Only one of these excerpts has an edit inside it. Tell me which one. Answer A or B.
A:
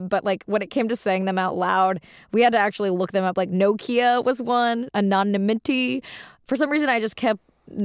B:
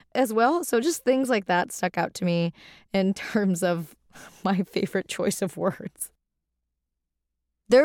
A